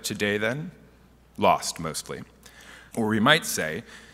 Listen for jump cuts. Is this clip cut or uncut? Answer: cut